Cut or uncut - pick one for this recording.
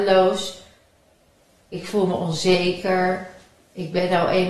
uncut